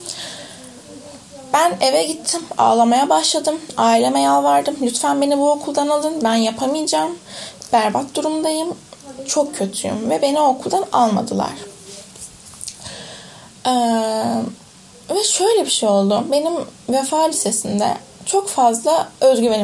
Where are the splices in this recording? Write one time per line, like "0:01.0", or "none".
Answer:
none